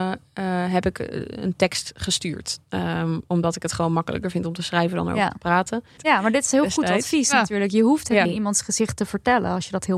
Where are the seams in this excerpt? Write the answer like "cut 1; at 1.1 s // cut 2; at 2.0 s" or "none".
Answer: cut 1; at 6.0 s // cut 2; at 8.3 s